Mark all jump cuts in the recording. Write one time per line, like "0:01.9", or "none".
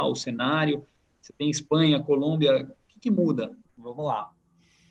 0:03.6